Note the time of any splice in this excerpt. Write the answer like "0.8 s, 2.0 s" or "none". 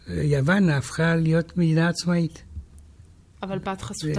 none